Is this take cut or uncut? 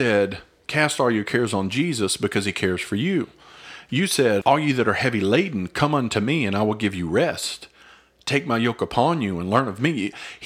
cut